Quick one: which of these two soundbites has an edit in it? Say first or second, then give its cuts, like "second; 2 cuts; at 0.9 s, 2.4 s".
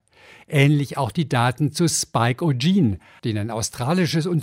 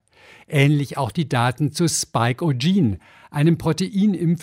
first; 1 cut; at 3.2 s